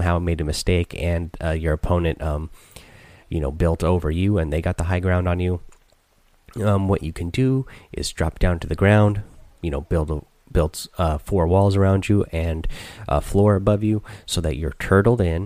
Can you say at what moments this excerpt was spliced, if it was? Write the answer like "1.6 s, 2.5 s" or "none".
none